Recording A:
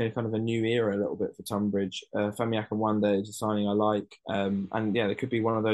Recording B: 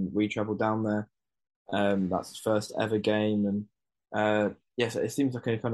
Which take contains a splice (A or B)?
A